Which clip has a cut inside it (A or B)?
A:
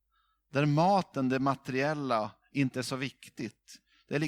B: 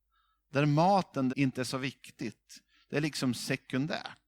B